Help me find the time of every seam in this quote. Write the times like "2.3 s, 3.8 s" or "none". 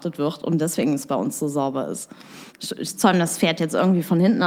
2.5 s